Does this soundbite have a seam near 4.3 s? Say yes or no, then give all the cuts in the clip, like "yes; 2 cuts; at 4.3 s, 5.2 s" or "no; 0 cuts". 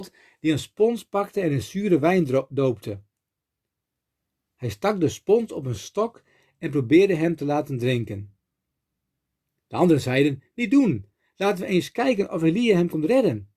no; 0 cuts